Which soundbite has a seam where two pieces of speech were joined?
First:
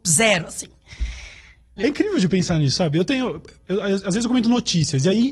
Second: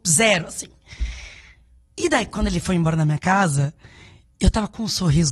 first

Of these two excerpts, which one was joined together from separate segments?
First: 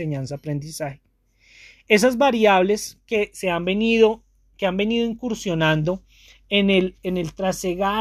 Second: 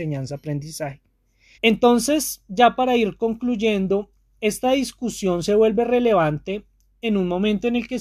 second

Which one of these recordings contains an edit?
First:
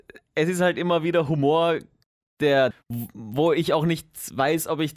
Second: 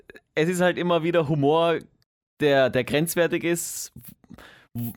first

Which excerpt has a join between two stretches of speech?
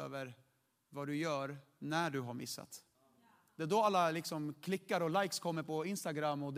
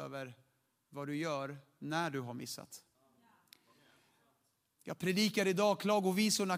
first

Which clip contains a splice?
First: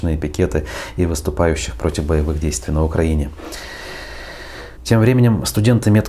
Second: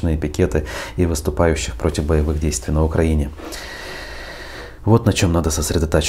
first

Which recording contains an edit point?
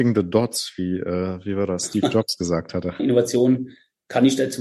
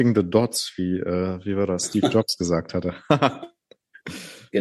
first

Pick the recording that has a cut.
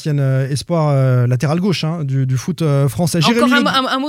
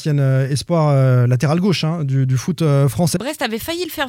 second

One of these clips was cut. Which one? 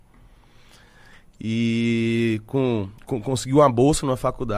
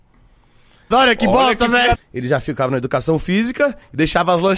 second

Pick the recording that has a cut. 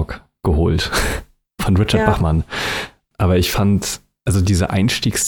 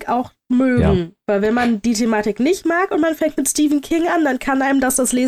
first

